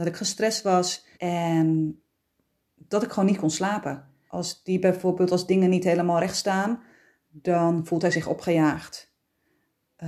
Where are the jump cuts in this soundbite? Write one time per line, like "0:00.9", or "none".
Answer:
0:01.1
0:04.3